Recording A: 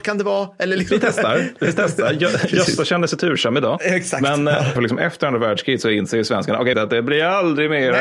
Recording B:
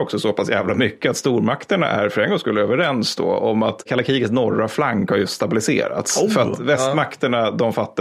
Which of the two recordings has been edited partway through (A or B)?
A